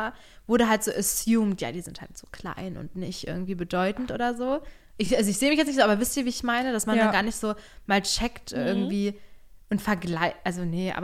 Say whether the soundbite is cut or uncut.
uncut